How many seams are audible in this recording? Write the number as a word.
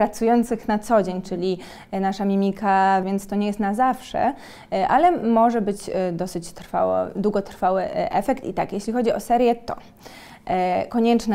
one